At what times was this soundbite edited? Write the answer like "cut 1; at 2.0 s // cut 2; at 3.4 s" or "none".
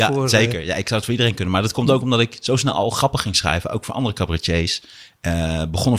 none